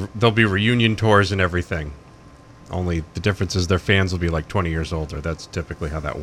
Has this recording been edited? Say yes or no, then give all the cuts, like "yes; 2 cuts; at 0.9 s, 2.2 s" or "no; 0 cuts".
no; 0 cuts